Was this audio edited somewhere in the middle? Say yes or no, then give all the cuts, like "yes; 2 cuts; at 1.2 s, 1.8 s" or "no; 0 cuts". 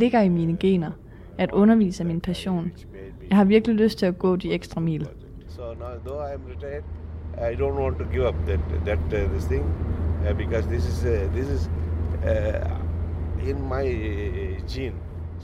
no; 0 cuts